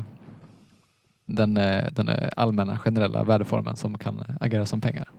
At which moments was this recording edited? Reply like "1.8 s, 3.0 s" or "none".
1.3 s